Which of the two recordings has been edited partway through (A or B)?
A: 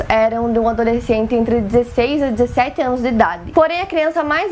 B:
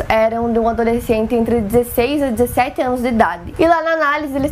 B